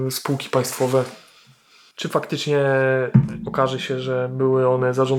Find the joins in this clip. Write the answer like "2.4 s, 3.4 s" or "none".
1.9 s